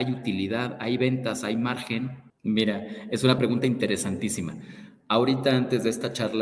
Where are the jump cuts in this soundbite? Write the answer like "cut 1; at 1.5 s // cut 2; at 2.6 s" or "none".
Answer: cut 1; at 2.3 s // cut 2; at 3.4 s

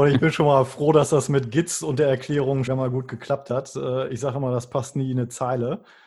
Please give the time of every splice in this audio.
cut 1; at 2.7 s

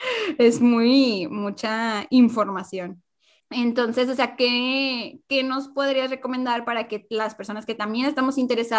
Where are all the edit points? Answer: cut 1; at 3.4 s

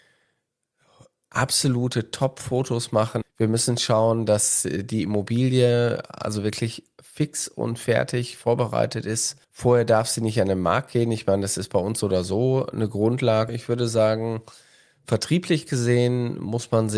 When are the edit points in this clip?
cut 1; at 3.2 s // cut 2; at 9.4 s // cut 3; at 13.5 s

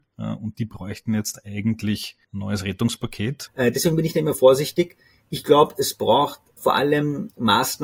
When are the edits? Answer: cut 1; at 2.2 s // cut 2; at 3.5 s

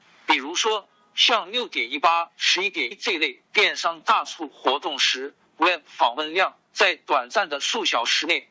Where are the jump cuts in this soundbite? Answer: cut 1; at 2.9 s

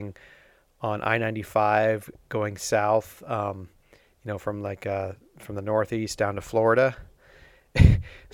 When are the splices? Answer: none

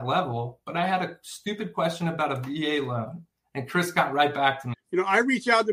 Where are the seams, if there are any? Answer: cut 1; at 4.7 s

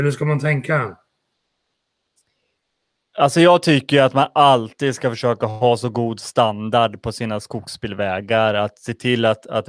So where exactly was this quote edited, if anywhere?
none

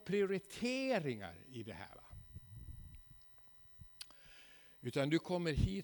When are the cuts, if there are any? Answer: none

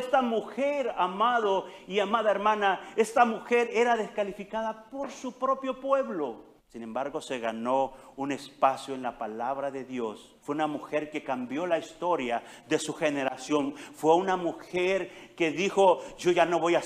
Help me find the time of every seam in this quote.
cut 1; at 6.6 s // cut 2; at 10.4 s

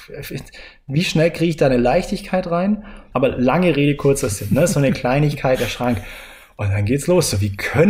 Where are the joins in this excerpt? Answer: cut 1; at 3.1 s

